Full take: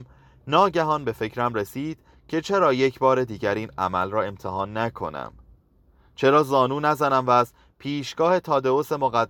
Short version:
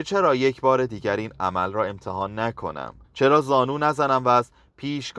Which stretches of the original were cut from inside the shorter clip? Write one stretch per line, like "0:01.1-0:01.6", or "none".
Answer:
0:05.4-0:06.1